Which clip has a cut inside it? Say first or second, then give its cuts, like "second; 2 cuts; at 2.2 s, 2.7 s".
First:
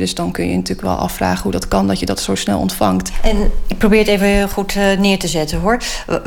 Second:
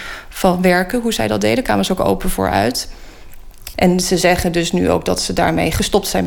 second; 1 cut; at 3.7 s